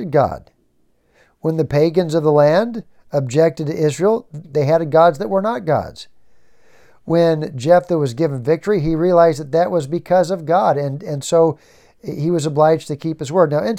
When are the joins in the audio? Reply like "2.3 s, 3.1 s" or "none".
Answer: 4.4 s